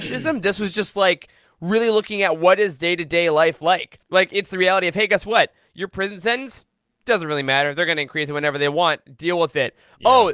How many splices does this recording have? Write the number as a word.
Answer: one